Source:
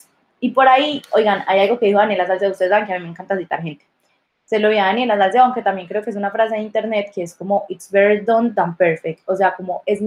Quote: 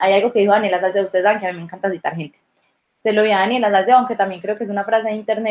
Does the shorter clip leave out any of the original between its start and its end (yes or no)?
no